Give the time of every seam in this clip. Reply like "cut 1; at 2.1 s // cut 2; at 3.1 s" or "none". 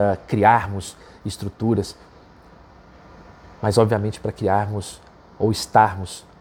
none